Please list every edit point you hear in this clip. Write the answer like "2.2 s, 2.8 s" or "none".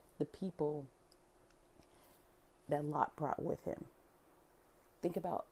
none